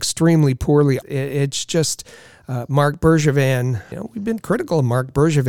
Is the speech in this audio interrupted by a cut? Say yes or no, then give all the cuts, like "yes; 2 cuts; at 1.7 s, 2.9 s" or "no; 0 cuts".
yes; 2 cuts; at 1.0 s, 3.9 s